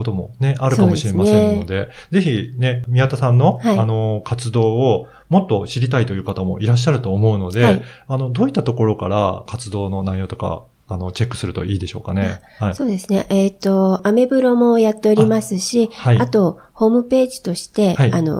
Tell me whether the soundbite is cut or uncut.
uncut